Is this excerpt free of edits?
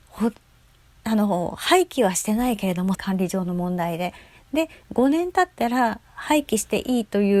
no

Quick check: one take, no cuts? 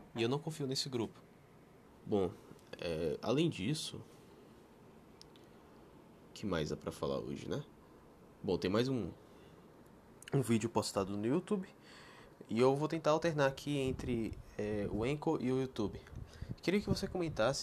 no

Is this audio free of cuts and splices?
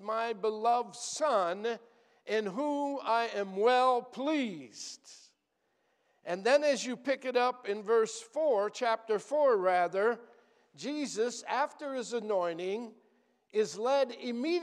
yes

